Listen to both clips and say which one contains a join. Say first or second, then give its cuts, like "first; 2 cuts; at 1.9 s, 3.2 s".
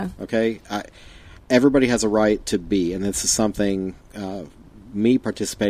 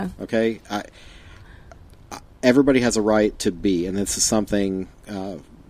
first; 1 cut; at 1.4 s